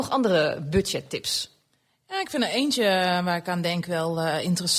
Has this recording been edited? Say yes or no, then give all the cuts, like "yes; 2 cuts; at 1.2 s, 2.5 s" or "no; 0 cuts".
no; 0 cuts